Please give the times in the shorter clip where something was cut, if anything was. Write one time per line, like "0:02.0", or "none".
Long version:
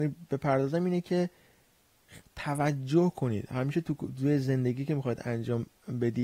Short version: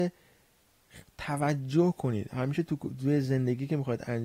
none